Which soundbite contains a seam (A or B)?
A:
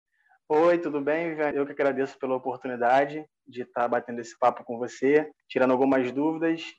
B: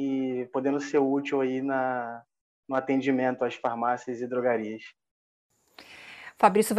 A